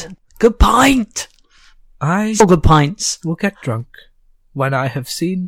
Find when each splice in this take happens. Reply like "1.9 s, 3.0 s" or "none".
none